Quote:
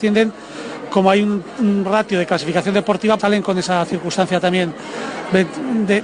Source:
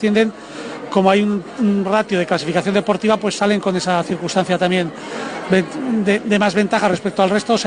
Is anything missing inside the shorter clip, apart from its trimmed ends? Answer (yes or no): yes